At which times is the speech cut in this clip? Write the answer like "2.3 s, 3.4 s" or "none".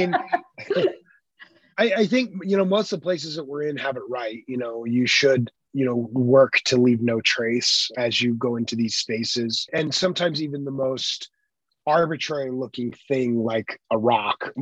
none